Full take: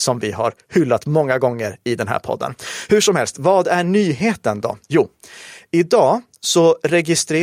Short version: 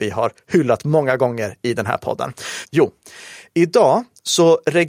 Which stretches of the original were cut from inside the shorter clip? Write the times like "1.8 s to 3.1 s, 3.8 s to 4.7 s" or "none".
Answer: 2.9 s to 4.8 s

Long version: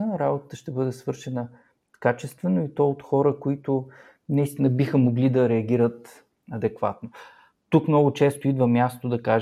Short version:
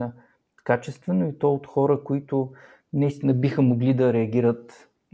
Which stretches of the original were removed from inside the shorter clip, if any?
none

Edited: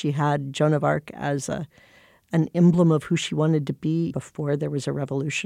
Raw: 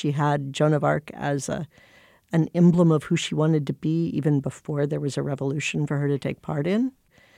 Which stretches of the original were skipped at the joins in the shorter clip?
4.1 s to 4.4 s

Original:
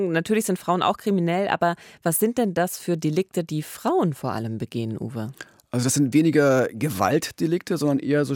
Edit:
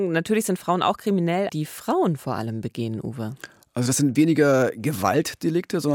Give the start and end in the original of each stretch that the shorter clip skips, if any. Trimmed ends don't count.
1.5 s to 3.4 s

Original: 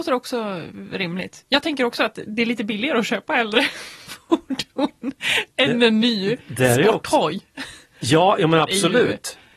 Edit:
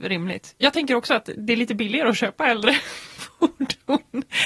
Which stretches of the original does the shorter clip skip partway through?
none

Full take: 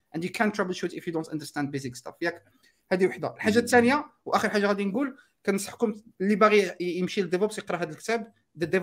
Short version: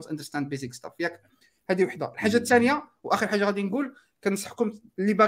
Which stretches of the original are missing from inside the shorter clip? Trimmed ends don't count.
none

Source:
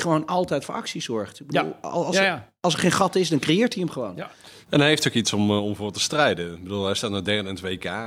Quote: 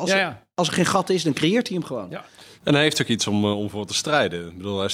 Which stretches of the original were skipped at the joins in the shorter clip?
none

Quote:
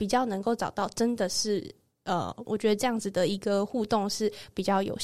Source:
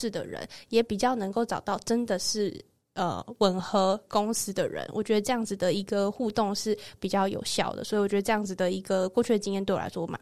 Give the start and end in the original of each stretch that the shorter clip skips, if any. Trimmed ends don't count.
3.4 s to 4.9 s

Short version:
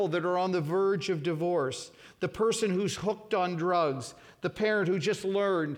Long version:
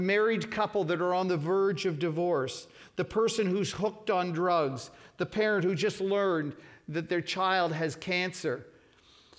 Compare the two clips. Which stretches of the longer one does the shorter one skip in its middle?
none

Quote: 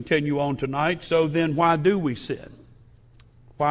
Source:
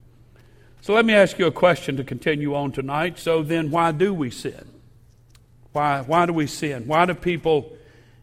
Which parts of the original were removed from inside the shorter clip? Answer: none

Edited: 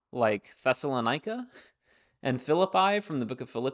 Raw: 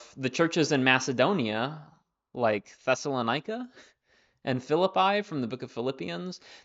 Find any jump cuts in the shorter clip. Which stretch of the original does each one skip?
none

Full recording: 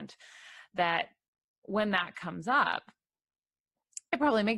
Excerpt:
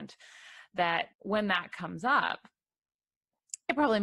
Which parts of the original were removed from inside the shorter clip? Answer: 1.1 s to 1.6 s

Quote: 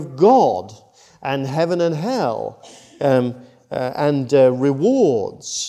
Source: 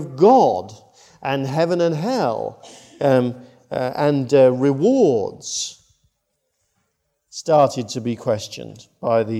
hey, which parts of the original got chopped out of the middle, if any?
none

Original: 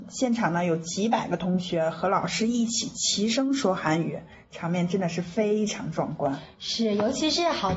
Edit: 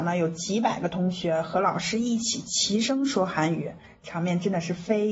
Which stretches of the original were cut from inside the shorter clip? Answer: none

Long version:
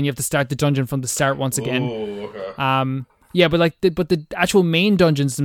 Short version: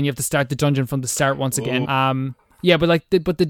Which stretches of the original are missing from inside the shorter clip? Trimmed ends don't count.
1.8 s to 2.6 s

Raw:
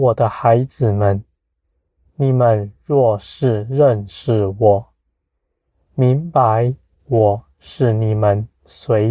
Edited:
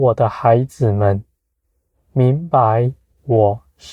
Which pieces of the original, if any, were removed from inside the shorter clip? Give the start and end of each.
1.9 s to 5.7 s

